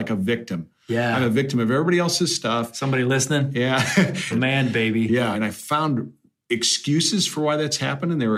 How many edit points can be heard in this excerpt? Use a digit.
2